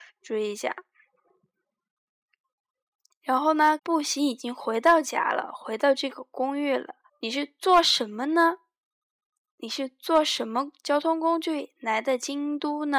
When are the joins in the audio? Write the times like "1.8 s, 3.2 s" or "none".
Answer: 3.8 s, 7.1 s